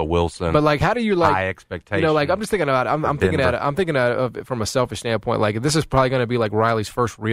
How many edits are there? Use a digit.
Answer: 0